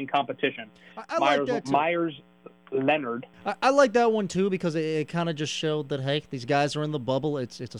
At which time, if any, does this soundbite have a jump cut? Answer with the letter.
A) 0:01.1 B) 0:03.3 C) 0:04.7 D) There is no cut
B